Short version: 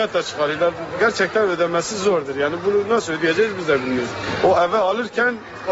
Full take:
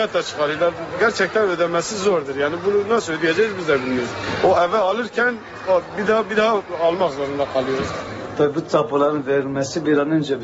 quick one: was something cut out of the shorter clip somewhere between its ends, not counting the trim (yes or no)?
no